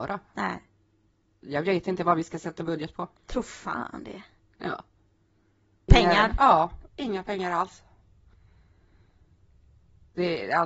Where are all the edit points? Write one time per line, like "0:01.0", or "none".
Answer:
0:03.2
0:05.9